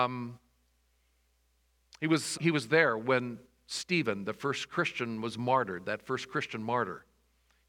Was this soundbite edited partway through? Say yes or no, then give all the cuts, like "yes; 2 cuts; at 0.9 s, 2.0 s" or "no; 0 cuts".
yes; 1 cut; at 2.3 s